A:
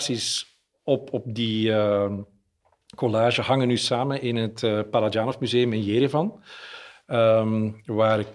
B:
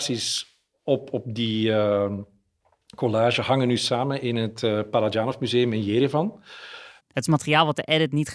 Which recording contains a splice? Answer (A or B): B